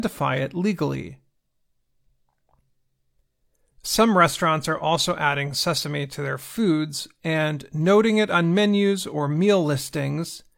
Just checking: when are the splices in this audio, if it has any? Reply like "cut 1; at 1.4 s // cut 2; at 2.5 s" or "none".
none